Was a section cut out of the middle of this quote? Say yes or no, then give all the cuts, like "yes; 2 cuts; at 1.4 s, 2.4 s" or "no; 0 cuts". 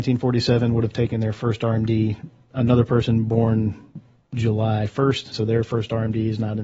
yes; 2 cuts; at 2.5 s, 5.3 s